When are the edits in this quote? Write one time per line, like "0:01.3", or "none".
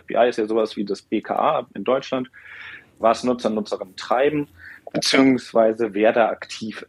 0:03.0